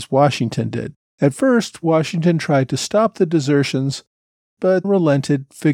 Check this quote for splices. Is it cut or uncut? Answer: cut